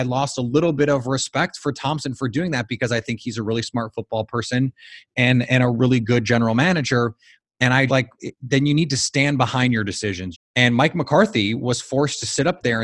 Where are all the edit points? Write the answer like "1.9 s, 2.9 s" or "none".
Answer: 7.9 s, 10.3 s